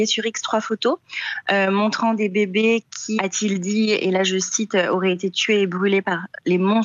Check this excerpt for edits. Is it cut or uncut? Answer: cut